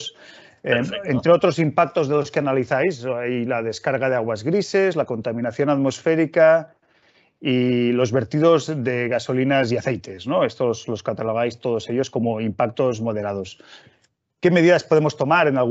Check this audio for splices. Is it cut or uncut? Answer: uncut